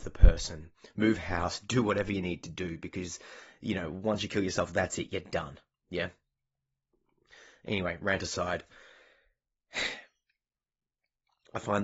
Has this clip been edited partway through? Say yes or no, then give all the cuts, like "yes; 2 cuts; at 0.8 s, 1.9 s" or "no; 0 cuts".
no; 0 cuts